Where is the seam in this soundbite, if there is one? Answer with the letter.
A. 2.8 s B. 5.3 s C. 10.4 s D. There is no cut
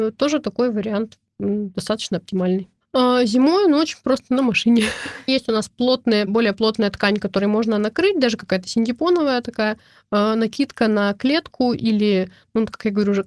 B